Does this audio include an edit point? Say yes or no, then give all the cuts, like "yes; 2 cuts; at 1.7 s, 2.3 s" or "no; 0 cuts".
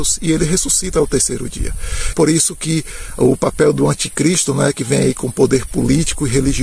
yes; 1 cut; at 2.1 s